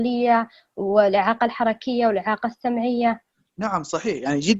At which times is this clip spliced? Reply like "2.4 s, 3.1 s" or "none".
none

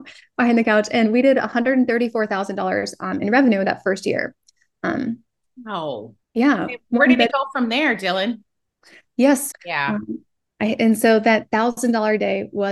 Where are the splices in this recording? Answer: 6.2 s, 9.5 s

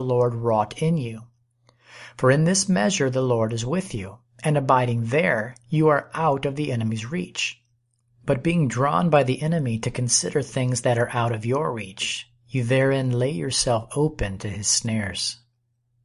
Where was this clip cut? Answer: none

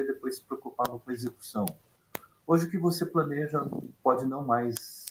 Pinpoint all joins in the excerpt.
none

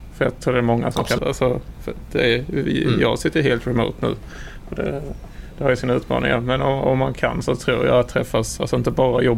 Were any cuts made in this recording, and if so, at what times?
1.2 s

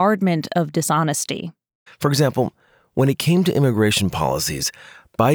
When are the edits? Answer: 1.9 s

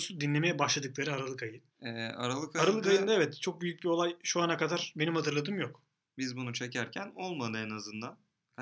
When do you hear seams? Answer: 1.7 s

